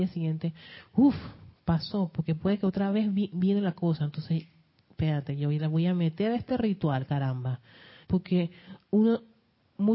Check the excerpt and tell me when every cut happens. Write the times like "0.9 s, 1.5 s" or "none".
8.0 s